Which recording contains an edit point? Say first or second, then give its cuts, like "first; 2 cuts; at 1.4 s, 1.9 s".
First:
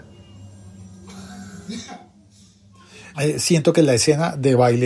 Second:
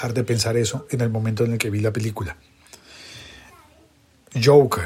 first; 1 cut; at 3.1 s